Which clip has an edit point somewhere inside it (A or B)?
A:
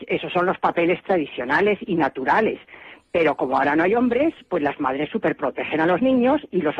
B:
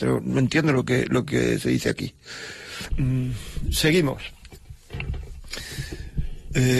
B